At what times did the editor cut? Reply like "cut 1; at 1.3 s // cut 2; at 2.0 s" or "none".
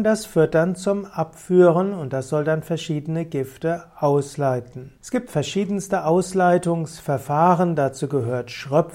cut 1; at 5.0 s